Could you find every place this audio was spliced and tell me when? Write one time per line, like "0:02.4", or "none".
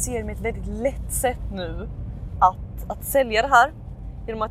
none